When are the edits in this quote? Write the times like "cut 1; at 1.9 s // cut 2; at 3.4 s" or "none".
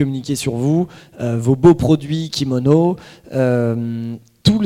none